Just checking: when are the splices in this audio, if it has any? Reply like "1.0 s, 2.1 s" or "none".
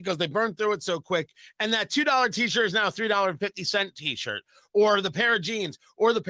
none